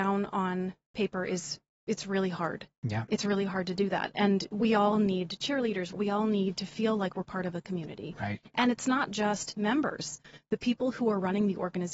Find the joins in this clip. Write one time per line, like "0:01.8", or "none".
0:05.9